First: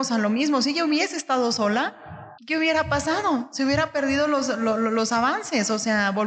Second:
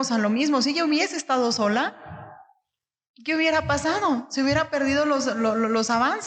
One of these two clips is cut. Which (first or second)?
first